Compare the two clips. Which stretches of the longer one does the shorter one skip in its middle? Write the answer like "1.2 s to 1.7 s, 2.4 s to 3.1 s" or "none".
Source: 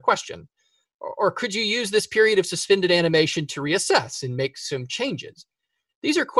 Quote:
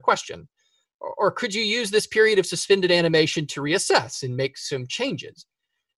none